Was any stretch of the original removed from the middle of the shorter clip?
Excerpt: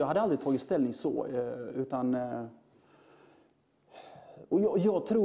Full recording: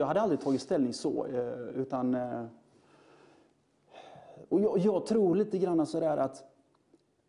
no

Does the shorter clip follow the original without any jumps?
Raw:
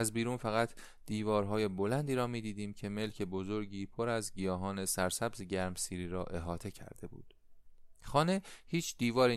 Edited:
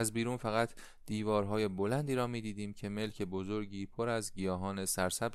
yes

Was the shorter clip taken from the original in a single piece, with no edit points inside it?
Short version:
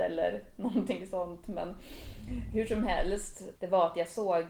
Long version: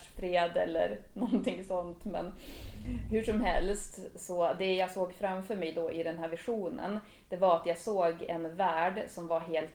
no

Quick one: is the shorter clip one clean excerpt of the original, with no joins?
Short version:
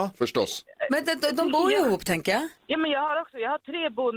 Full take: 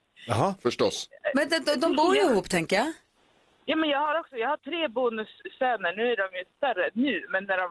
no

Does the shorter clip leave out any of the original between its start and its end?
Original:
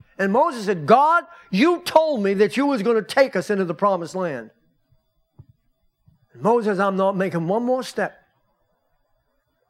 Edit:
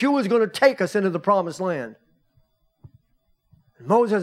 no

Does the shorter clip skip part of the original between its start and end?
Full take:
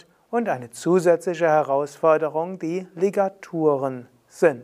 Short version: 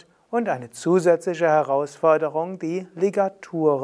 no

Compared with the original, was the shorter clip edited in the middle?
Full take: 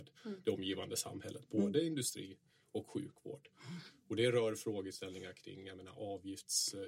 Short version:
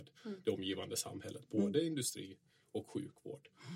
no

